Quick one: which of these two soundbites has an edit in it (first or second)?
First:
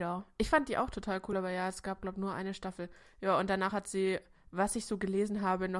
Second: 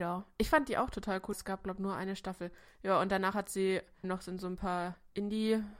second